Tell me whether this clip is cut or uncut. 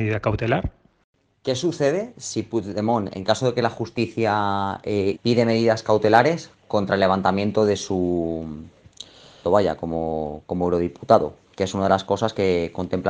cut